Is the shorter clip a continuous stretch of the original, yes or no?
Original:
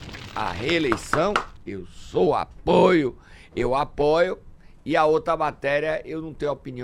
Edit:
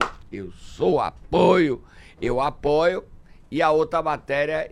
yes